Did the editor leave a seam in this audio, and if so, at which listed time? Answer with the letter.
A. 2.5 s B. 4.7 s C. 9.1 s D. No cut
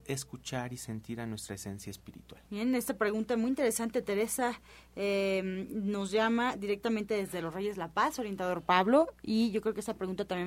A